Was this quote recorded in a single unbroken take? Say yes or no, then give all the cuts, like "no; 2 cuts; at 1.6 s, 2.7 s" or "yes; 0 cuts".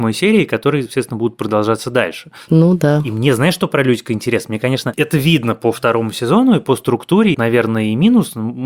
no; 2 cuts; at 2.5 s, 7.3 s